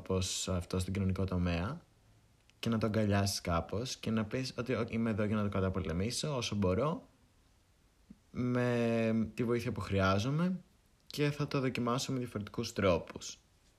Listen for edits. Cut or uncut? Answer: cut